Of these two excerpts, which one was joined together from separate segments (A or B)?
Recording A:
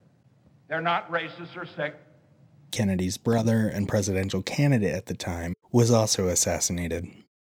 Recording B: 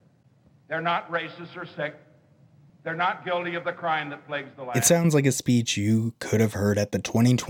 A